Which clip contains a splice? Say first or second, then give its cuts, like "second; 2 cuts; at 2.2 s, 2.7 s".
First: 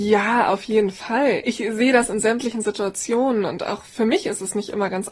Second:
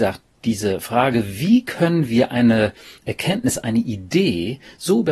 first; 1 cut; at 1.4 s